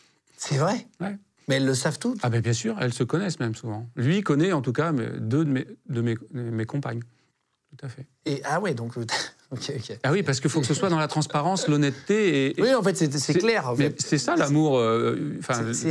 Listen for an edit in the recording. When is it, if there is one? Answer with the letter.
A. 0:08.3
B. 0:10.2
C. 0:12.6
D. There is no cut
A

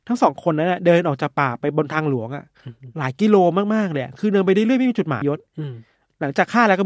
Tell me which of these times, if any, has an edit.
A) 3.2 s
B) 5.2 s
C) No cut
B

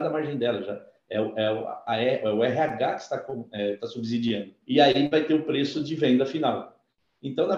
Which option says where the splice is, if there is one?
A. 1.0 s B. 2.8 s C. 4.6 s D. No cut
C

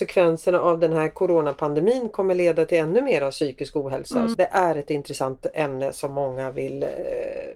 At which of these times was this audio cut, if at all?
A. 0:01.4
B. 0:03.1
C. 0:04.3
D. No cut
C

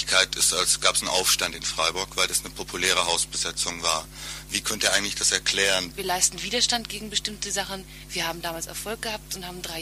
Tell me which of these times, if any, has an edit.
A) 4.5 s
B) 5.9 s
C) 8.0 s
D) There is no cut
B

